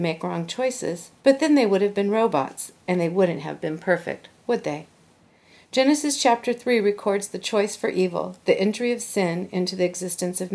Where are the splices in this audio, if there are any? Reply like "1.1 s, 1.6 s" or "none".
1.2 s